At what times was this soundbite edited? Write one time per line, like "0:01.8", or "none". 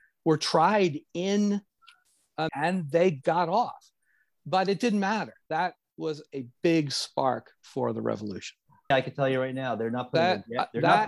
0:02.5
0:08.9